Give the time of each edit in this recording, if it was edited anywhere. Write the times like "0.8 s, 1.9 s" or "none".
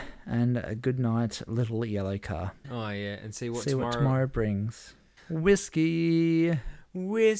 2.6 s, 5.2 s